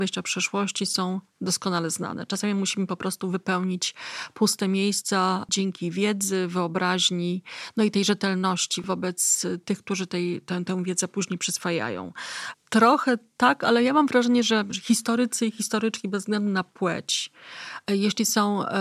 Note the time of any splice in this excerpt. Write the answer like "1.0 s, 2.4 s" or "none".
12.5 s

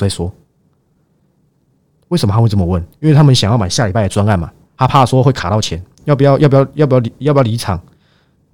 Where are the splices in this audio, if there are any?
5.9 s

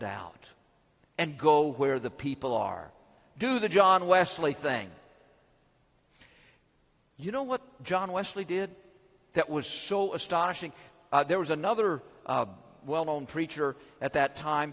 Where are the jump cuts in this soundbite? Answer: none

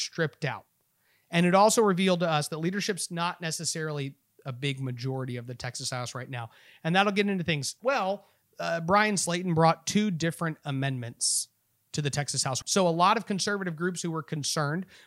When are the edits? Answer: 7.8 s, 12.6 s

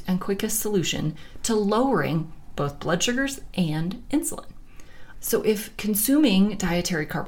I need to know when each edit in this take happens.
5.1 s

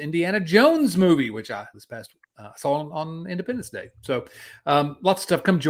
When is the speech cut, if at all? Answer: 1.7 s

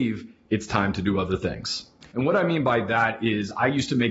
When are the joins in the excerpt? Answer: 2.1 s

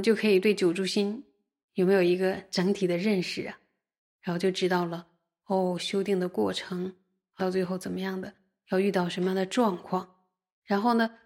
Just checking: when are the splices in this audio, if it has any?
7.4 s

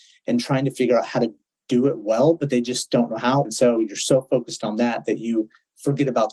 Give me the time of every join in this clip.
3.4 s

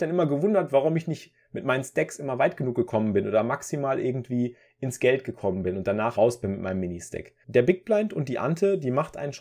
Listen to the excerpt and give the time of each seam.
6.2 s, 7.4 s

